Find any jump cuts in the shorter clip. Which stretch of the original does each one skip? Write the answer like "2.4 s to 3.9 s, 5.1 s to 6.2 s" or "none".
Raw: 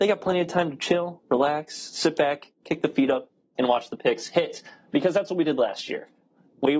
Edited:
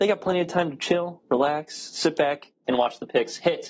2.6 s to 3.5 s